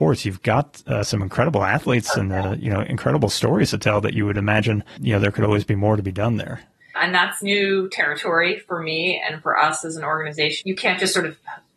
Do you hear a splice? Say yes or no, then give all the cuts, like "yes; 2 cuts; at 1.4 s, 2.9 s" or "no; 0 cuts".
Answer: yes; 2 cuts; at 7.0 s, 10.6 s